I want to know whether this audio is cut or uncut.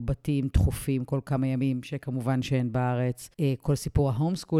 cut